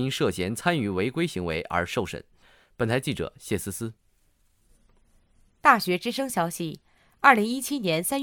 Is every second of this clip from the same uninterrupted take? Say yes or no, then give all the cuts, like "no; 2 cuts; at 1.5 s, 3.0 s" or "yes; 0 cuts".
yes; 0 cuts